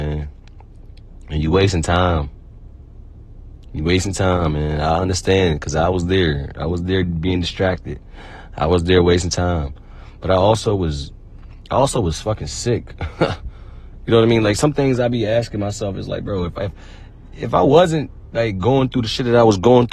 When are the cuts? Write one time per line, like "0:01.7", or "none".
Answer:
none